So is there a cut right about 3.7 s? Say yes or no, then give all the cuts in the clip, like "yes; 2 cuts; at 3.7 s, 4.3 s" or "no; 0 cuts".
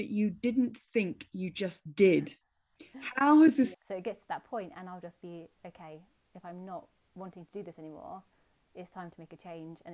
yes; 1 cut; at 3.7 s